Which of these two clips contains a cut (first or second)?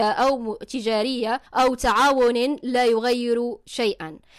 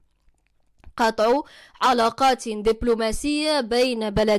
first